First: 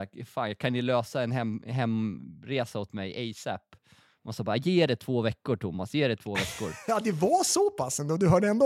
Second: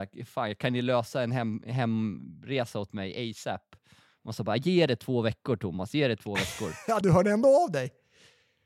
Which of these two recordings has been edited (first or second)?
second